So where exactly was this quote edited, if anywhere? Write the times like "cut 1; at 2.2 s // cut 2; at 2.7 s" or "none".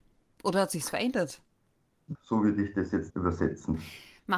cut 1; at 2.1 s